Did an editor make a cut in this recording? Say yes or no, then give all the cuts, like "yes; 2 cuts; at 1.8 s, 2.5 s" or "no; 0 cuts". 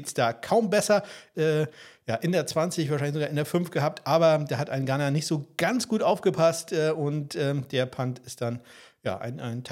yes; 1 cut; at 1.3 s